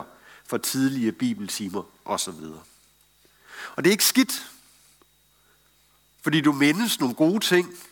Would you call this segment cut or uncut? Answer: uncut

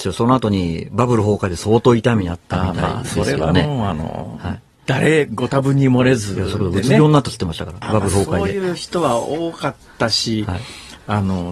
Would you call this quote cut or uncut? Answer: cut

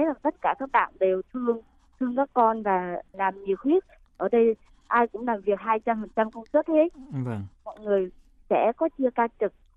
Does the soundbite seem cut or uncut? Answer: cut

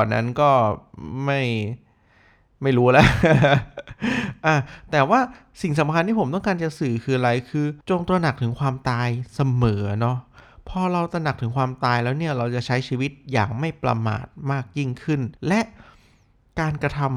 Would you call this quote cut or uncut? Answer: cut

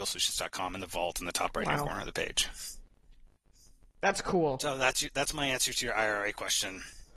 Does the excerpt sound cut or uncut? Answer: uncut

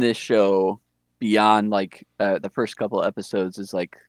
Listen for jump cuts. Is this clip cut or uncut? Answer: uncut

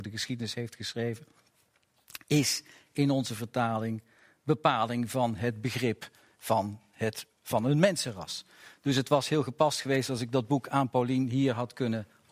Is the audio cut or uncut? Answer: uncut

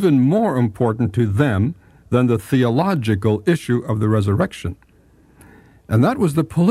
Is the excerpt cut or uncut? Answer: uncut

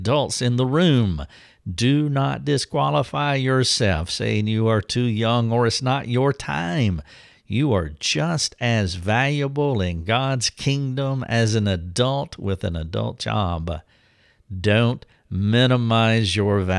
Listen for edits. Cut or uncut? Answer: uncut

